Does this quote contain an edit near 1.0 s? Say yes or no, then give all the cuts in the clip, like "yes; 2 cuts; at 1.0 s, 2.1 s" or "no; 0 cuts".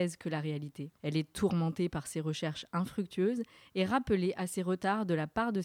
yes; 1 cut; at 1.0 s